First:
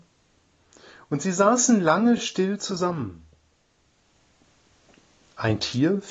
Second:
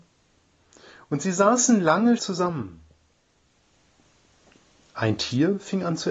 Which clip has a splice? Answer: second; 1 cut; at 2.2 s

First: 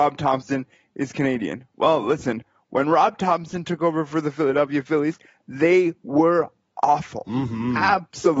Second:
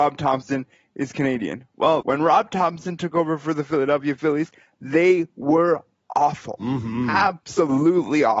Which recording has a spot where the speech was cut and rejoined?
second; 1 cut; at 2.0 s

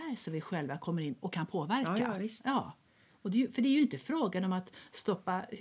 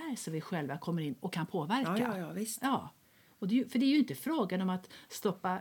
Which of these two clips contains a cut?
first; 1 cut; at 2.2 s

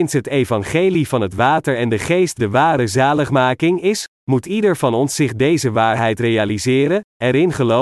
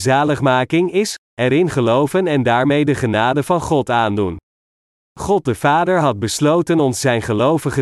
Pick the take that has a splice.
second; 1 cut; at 1.3 s

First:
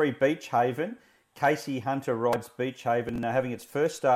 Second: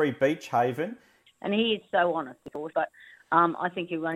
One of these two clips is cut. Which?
second; 2 cuts; at 1.3 s, 2.7 s

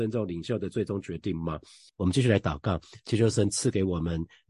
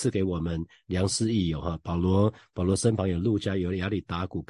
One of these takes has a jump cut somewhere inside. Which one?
first; 1 cut; at 1.9 s

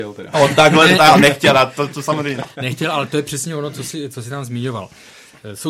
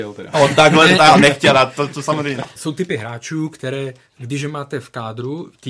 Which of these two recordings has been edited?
second; 1 cut; at 2.6 s

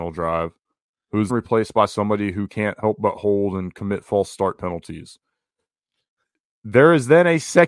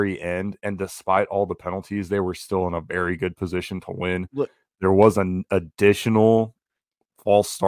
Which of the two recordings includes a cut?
first; 1 cut; at 1.3 s

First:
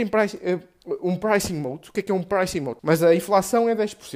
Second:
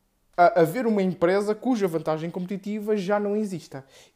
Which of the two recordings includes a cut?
first; 1 cut; at 2.8 s

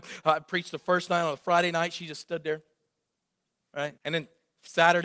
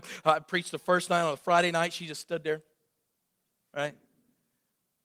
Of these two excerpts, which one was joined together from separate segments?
first; 1 cut; at 4.0 s

